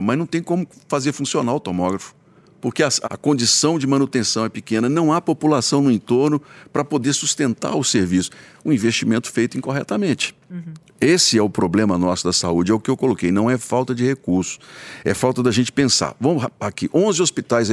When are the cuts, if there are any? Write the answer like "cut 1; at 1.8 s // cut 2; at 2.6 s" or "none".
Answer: cut 1; at 3.0 s